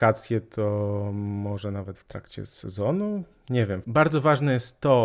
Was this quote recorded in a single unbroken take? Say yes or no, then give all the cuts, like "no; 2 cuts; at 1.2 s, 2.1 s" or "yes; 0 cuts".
no; 1 cut; at 3.8 s